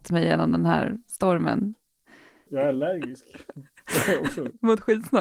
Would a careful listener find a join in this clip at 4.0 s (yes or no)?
no